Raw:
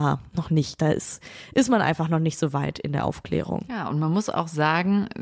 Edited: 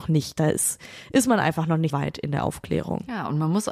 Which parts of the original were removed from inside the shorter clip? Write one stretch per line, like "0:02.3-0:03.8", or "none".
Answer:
0:02.3-0:02.5